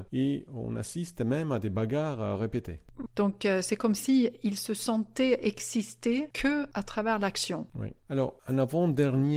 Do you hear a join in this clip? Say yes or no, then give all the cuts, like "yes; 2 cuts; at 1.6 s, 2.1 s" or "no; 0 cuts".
yes; 1 cut; at 3.1 s